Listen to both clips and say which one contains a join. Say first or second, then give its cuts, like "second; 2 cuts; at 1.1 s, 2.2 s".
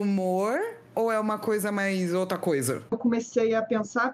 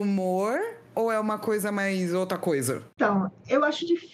first; 1 cut; at 2.9 s